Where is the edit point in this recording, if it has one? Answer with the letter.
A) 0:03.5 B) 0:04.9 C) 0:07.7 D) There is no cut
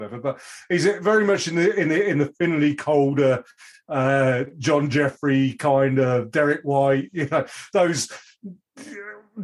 D